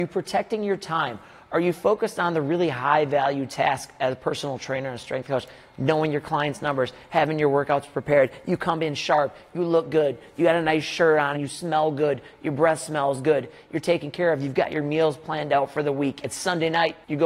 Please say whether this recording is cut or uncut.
cut